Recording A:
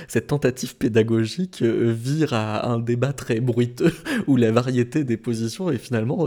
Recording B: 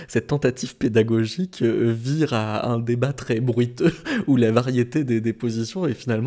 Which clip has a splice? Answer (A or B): A